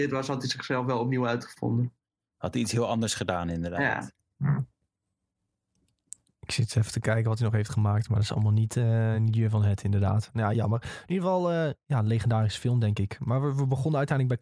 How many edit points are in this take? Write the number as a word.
zero